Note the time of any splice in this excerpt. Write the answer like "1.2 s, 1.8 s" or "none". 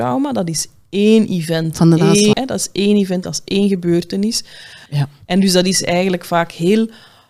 2.3 s, 4.9 s